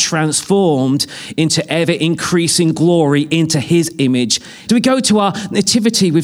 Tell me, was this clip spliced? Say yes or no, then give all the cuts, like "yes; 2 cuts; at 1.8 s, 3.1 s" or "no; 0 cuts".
yes; 1 cut; at 4.7 s